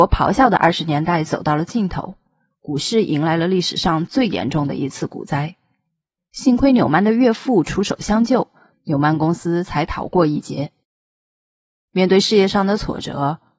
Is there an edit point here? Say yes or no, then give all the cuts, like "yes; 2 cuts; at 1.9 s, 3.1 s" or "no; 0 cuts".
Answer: yes; 2 cuts; at 6.2 s, 8.7 s